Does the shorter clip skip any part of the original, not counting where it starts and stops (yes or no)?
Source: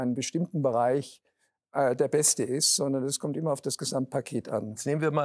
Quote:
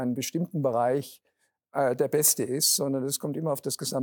no